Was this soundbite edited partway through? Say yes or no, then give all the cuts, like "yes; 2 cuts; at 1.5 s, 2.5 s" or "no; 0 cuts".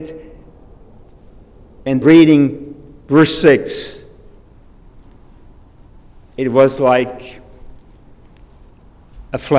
yes; 1 cut; at 2.0 s